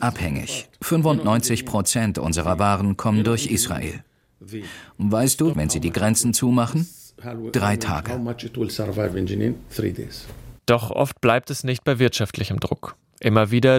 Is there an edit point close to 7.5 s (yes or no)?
no